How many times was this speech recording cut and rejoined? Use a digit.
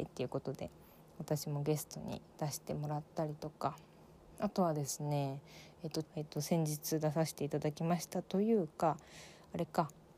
1